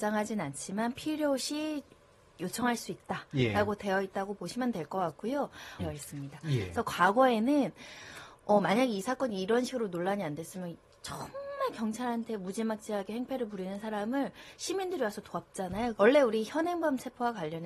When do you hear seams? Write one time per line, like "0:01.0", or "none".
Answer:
0:05.8
0:16.0